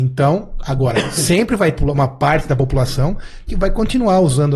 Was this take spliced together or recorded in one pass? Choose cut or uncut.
cut